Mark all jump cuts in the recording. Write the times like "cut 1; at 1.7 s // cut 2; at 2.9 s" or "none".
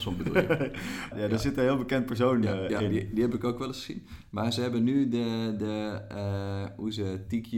cut 1; at 1.1 s